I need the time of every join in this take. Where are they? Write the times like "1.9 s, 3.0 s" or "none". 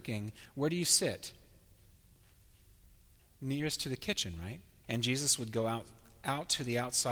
3.2 s, 4.8 s